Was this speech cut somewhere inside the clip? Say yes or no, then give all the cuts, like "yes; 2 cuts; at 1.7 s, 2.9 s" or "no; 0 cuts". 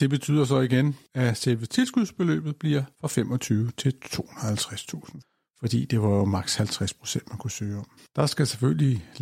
yes; 1 cut; at 8.0 s